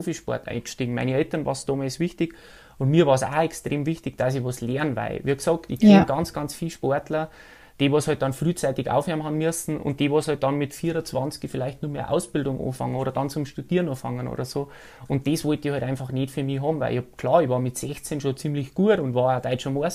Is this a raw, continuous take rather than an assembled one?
yes; 0 cuts

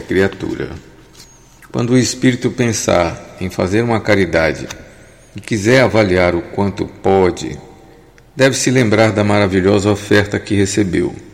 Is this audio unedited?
yes; 0 cuts

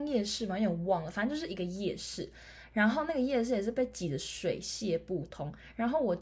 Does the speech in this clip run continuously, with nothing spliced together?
yes; 0 cuts

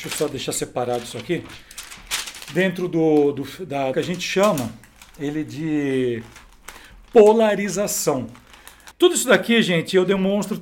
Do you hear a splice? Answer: yes; 2 cuts; at 3.9 s, 8.9 s

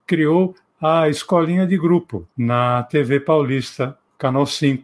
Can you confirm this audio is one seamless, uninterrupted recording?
no; 1 cut; at 2.3 s

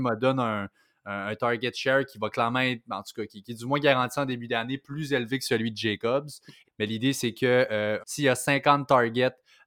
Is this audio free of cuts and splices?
no; 2 cuts; at 6.6 s, 8.0 s

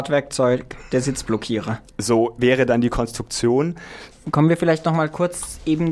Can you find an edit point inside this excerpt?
yes; 1 cut; at 4.1 s

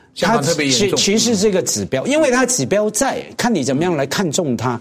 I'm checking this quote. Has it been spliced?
no; 0 cuts

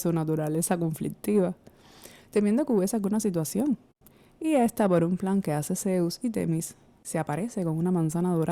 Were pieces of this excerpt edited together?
no; 0 cuts

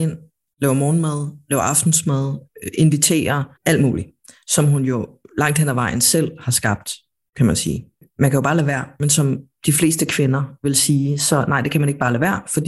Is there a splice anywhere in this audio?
yes; 1 cut; at 3.6 s

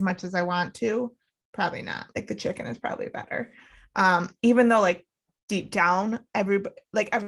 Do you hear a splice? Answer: yes; 1 cut; at 4.4 s

